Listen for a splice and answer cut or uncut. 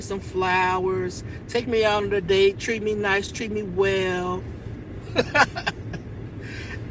uncut